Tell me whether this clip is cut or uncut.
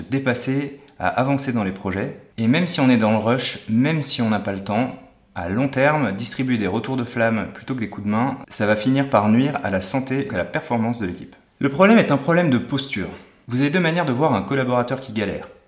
cut